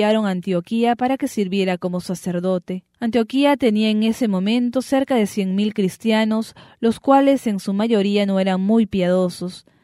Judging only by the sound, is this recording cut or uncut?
cut